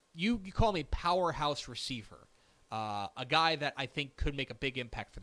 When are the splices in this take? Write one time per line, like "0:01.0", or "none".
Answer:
none